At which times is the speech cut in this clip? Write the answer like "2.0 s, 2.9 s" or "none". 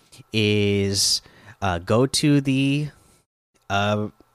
none